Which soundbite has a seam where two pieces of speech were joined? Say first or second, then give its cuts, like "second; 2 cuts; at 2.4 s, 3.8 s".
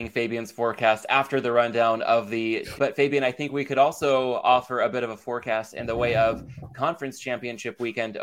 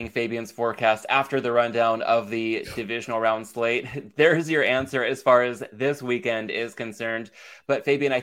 first; 1 cut; at 2.8 s